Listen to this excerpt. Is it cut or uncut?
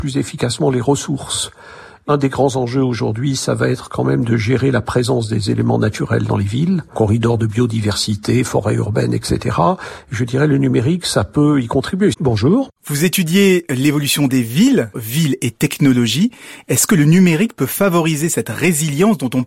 cut